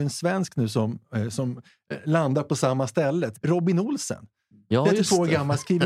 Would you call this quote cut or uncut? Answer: cut